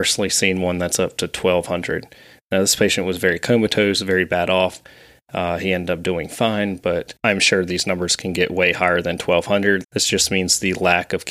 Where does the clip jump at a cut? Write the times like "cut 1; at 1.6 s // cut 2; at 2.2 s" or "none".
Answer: cut 1; at 9.8 s